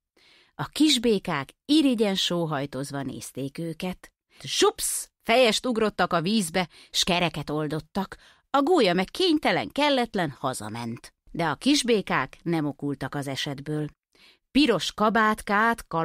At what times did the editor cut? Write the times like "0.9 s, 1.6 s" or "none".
4.4 s, 11.2 s